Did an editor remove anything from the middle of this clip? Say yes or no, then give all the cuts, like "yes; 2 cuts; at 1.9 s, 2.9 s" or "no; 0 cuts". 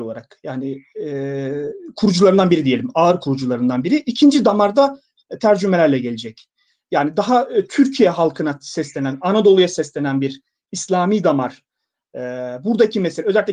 no; 0 cuts